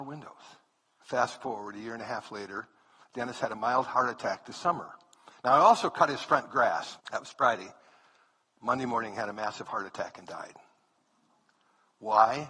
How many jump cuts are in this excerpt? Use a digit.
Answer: 2